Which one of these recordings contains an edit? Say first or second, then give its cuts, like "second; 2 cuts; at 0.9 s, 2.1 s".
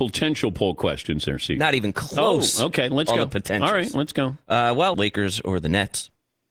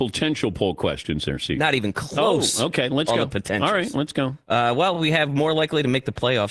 first; 1 cut; at 4.9 s